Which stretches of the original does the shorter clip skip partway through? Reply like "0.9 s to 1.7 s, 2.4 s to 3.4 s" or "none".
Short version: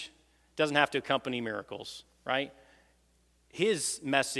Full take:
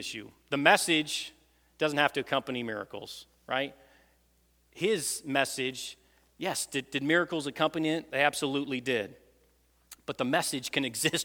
none